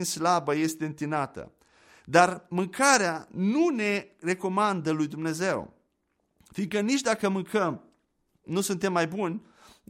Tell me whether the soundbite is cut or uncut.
uncut